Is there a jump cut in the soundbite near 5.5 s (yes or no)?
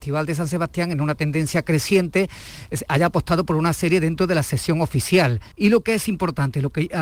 yes